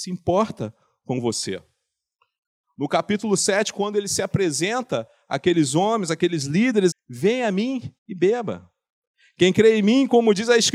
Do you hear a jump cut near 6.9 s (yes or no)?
yes